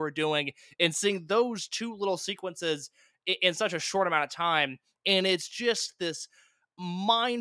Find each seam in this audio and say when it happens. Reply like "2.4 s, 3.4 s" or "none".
5.0 s